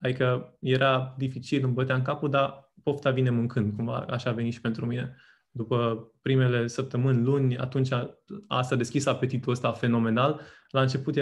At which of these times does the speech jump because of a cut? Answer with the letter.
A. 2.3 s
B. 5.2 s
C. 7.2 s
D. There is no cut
D